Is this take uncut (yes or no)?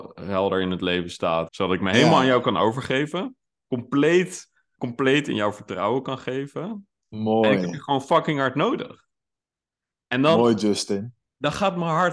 no